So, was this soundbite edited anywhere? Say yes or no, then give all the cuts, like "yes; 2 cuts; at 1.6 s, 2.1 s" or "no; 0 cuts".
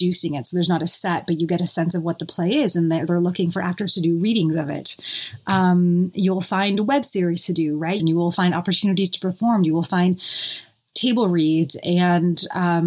yes; 1 cut; at 8.0 s